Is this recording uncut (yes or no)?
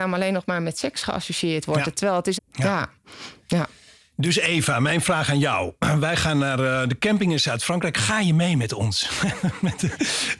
no